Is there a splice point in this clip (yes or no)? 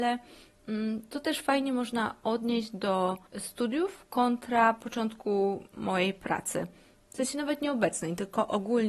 yes